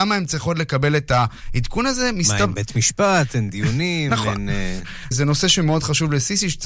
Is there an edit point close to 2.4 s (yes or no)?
no